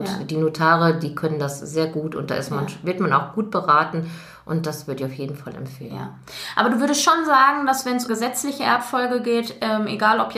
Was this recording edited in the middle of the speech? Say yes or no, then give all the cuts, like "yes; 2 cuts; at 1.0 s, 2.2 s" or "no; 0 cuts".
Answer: yes; 1 cut; at 8.1 s